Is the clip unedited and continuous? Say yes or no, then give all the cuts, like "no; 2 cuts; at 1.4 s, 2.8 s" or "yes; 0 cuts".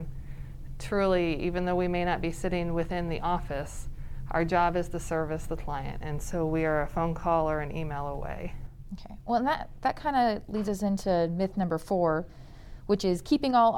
yes; 0 cuts